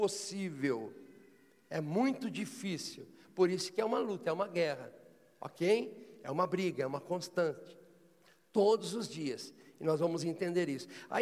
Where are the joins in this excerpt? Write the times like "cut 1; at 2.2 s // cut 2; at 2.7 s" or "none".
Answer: none